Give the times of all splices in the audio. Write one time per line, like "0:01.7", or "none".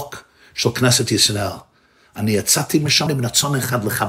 0:03.1